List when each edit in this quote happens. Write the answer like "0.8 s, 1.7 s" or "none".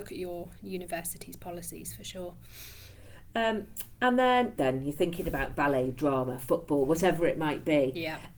4.6 s

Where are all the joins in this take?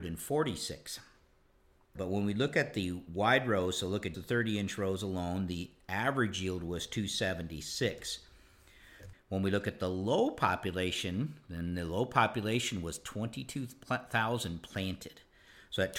2.0 s, 4.1 s, 9.1 s

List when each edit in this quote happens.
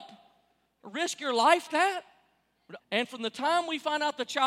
1.7 s, 2.8 s

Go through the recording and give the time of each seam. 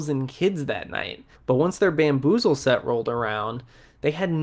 1.3 s

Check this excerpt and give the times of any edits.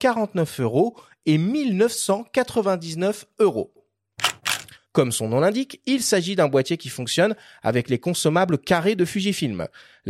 4.8 s

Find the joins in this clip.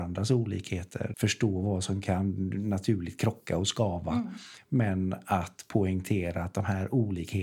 1.1 s

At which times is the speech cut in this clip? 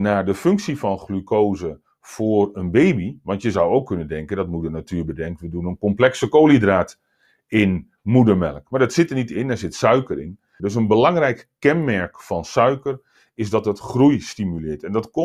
10.6 s

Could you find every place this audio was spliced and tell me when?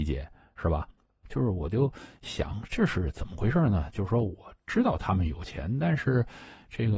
1.2 s

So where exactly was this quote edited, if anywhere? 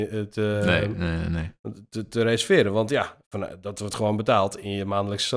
none

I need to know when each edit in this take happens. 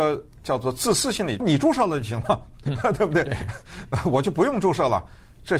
1.4 s

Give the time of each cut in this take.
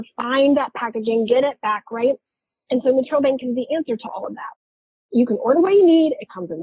none

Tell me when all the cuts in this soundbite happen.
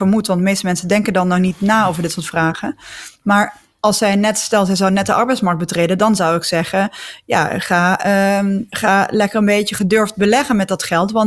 8.7 s

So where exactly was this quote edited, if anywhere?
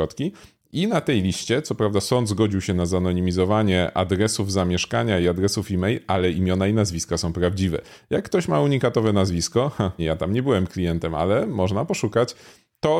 10.0 s

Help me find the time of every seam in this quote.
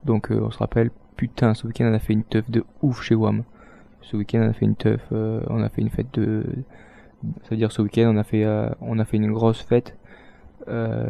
7.3 s

